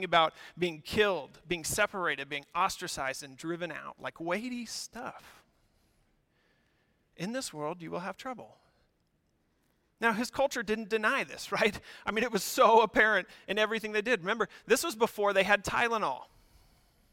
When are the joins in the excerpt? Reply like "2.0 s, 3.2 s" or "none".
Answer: none